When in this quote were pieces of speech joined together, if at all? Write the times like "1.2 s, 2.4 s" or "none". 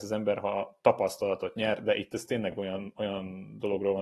none